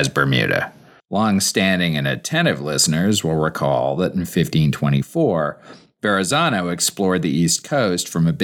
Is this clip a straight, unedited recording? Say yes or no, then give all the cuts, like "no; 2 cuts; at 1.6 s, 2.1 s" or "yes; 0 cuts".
no; 1 cut; at 1.0 s